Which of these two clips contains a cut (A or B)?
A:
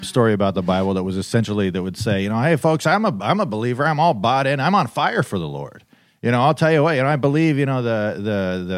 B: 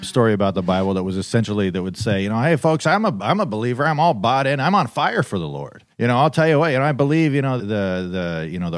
B